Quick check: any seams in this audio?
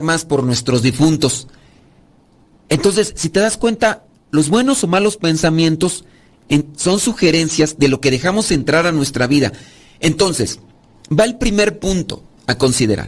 no; 0 cuts

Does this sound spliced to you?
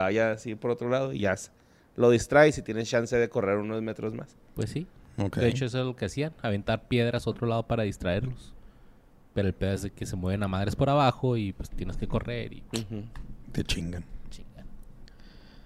no; 0 cuts

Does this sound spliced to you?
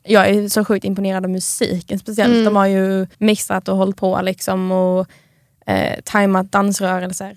yes; 1 cut; at 3.1 s

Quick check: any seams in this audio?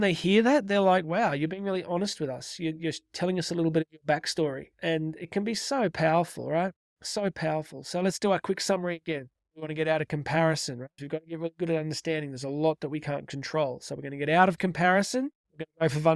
yes; 2 cuts; at 9.4 s, 11.0 s

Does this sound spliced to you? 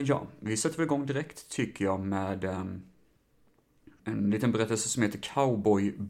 yes; 1 cut; at 4.0 s

